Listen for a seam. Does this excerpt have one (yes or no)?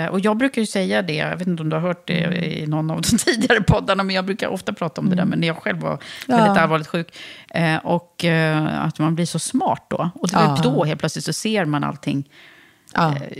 yes